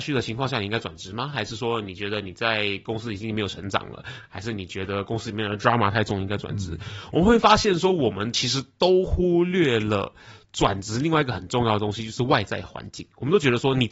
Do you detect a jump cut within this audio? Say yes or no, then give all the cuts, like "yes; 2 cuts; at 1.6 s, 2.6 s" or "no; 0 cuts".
no; 0 cuts